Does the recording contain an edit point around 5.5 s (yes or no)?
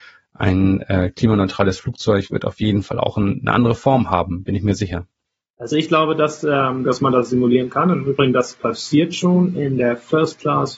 no